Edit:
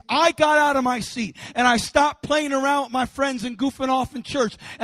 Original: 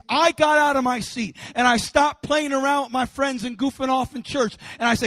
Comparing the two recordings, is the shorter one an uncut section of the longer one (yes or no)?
yes